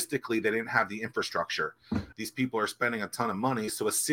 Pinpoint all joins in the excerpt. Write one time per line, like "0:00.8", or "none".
0:02.1

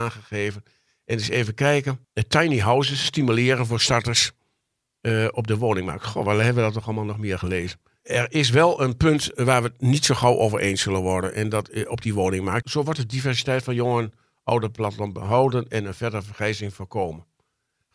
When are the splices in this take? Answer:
0:12.6

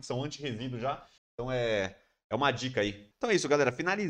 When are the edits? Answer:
0:01.2
0:03.1

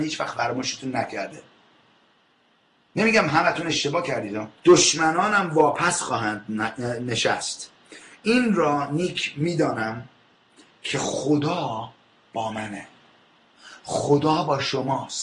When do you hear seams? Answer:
0:04.6

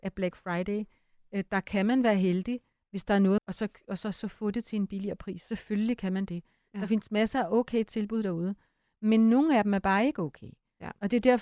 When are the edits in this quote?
0:03.4

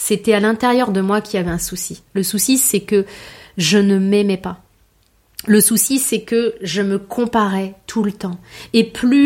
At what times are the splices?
none

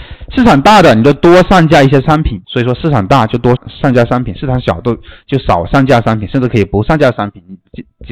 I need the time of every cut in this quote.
0:02.4
0:03.6

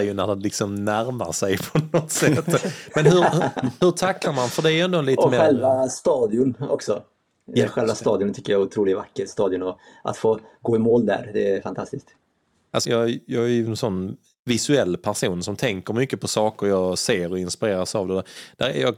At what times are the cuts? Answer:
0:12.8

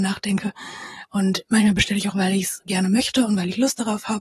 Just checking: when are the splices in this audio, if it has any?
0:01.0
0:02.1

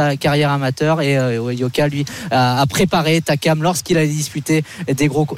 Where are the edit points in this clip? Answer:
none

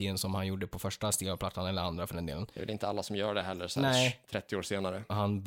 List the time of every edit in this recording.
none

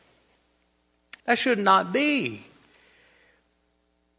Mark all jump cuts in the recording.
0:01.2

